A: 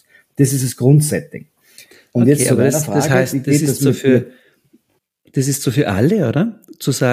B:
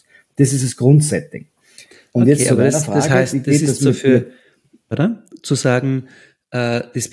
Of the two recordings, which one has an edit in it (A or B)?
B